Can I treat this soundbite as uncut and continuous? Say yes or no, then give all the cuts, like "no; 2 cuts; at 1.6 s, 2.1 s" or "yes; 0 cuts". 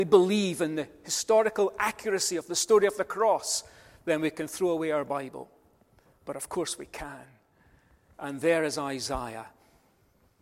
no; 1 cut; at 8.1 s